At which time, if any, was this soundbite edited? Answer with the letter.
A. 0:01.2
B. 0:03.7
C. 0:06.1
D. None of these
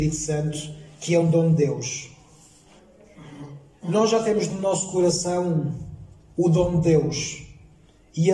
A